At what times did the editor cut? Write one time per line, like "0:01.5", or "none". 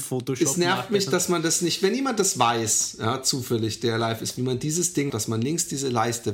0:05.1